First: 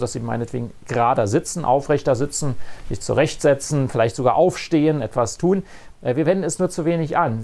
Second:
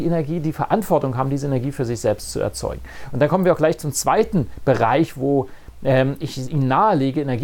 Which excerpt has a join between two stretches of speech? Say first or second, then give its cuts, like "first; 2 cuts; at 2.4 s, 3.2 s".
first; 1 cut; at 5.9 s